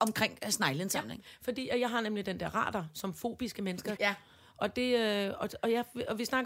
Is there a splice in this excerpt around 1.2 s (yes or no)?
no